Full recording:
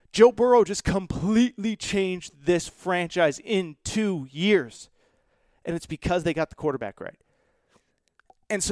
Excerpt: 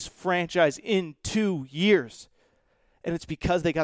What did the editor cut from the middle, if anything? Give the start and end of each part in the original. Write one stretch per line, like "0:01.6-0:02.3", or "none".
none